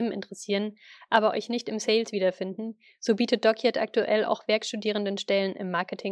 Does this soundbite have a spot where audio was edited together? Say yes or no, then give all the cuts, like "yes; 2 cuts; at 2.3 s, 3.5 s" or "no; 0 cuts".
no; 0 cuts